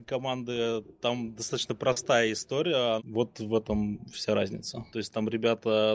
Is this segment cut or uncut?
cut